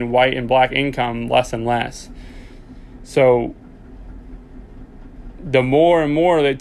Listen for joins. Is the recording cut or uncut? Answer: uncut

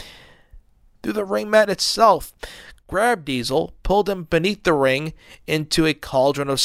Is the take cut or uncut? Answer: cut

